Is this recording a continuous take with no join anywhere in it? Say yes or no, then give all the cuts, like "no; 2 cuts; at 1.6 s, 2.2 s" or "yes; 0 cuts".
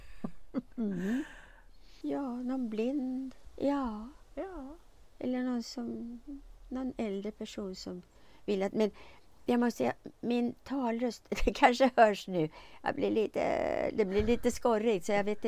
no; 1 cut; at 2.0 s